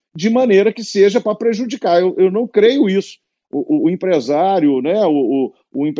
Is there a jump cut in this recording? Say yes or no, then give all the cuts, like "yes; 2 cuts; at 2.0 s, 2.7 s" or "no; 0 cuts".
no; 0 cuts